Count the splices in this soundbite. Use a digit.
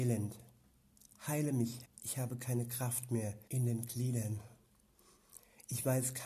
2